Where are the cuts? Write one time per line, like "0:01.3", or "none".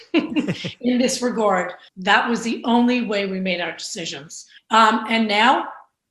0:01.9
0:04.6